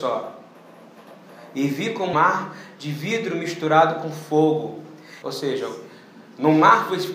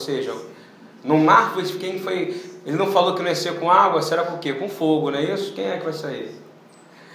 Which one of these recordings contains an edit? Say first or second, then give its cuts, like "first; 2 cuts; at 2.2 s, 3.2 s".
first; 2 cuts; at 2.1 s, 5.2 s